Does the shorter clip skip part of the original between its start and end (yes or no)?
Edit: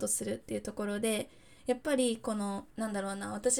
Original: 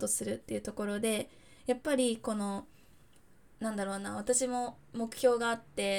yes